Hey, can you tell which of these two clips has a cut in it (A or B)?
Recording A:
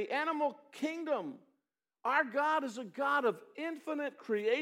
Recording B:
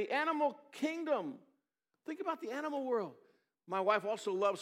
B